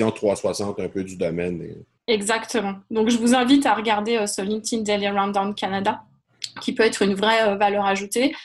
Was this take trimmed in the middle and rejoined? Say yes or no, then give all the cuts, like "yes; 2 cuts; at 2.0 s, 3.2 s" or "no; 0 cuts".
no; 0 cuts